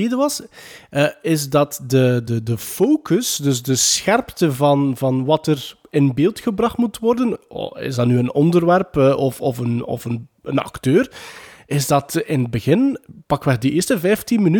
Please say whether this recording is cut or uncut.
uncut